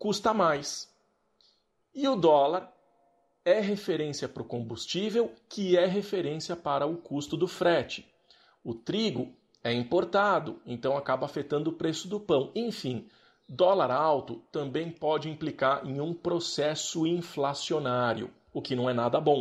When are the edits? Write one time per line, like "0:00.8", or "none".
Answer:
none